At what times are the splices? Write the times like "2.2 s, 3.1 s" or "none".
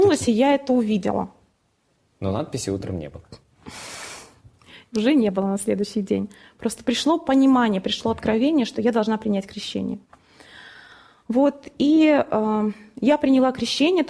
none